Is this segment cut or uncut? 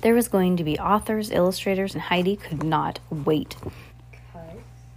cut